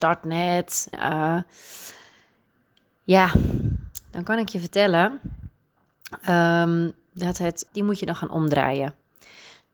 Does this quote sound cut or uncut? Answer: cut